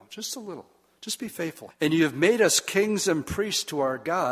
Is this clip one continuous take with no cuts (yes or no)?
no